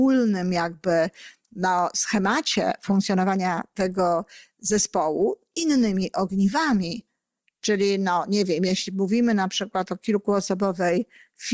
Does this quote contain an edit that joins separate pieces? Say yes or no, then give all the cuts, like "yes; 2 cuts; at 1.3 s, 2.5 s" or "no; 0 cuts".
no; 0 cuts